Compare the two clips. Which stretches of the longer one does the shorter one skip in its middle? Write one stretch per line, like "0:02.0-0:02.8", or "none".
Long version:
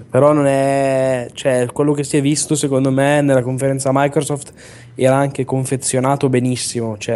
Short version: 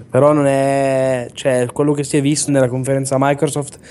0:02.5-0:03.2